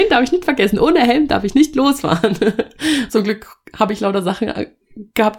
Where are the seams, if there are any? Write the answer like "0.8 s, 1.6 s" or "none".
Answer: 3.1 s